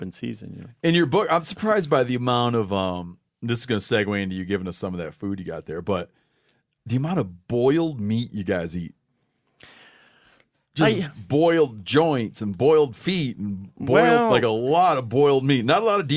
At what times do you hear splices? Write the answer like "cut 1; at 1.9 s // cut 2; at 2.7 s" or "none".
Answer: none

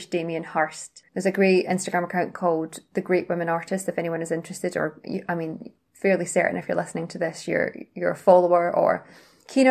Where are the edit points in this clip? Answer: cut 1; at 1.0 s

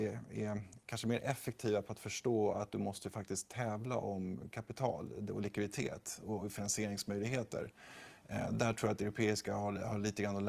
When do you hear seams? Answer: none

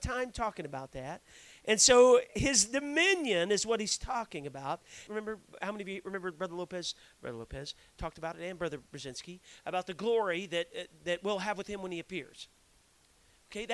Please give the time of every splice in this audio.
cut 1; at 5.1 s

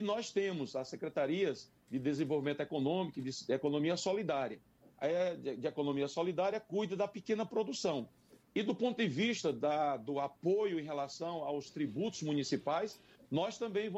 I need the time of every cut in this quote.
cut 1; at 8.4 s

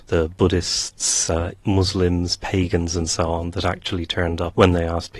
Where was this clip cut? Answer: none

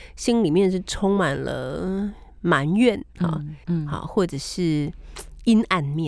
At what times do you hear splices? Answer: cut 1; at 3.6 s

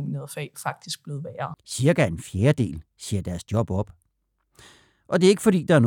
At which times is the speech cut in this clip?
cut 1; at 1.5 s

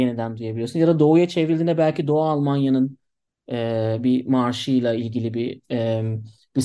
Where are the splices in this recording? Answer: none

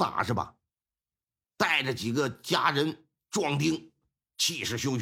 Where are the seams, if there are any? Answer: cut 1; at 1.4 s

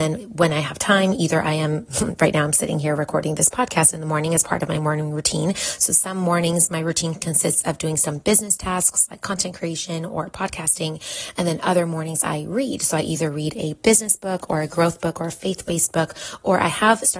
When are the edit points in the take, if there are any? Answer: none

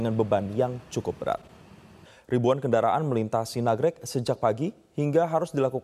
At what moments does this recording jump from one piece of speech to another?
none

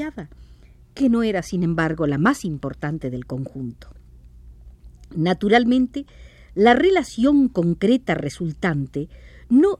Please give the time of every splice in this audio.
none

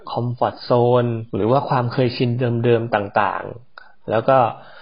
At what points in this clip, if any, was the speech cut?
cut 1; at 1.3 s

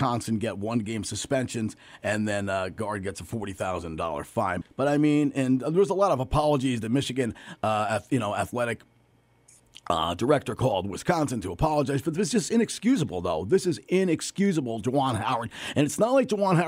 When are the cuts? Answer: cut 1; at 4.6 s

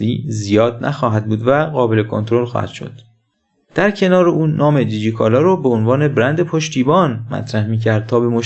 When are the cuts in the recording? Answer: cut 1; at 3.6 s

